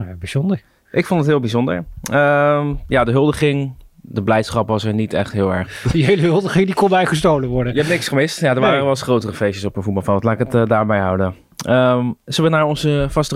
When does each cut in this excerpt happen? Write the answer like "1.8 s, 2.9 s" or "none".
5.7 s